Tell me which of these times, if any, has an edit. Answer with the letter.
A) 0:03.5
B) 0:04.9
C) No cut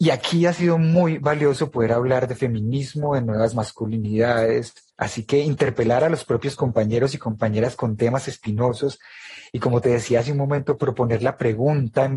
B